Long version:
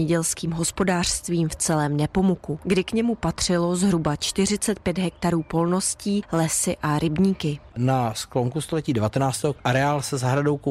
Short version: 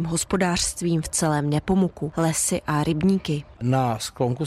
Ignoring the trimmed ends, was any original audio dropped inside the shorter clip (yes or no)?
yes